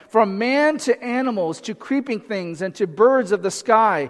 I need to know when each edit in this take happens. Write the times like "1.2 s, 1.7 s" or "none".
none